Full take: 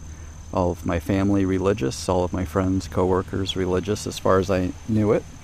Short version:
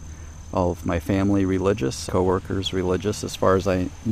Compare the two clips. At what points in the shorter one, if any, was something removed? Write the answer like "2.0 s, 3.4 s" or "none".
2.1 s

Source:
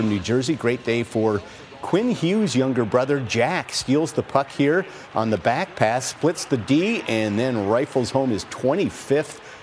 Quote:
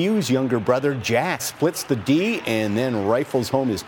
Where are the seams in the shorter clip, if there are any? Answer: 1.4 s

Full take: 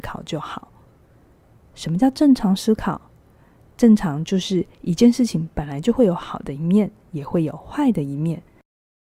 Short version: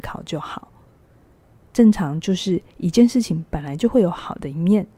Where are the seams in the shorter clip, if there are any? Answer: 1.6 s

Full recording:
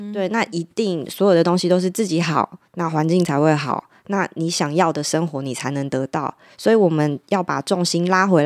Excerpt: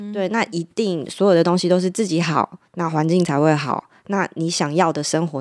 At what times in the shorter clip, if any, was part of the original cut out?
none

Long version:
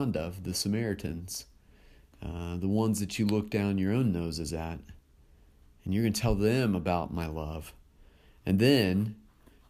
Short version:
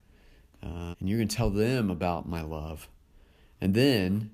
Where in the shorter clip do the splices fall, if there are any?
0.9 s

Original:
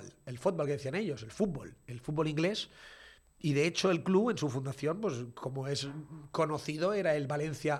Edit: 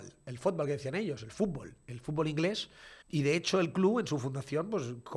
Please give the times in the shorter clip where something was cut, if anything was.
3.0 s

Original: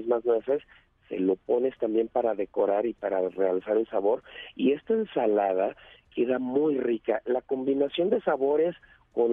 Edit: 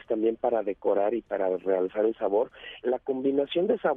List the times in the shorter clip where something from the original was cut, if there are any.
2.8 s

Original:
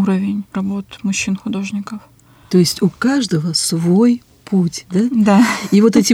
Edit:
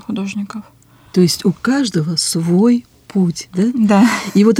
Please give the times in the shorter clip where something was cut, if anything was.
none

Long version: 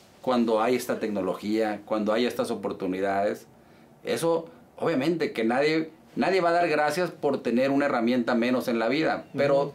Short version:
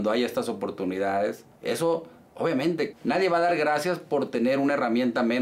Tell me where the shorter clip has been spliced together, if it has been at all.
1.5 s, 2.9 s

